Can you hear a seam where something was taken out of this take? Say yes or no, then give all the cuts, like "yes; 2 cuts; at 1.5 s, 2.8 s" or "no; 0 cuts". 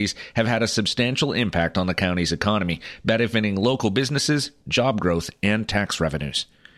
no; 0 cuts